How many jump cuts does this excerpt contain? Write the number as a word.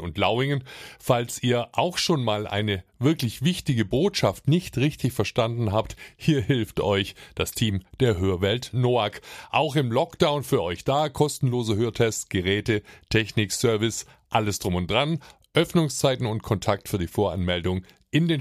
zero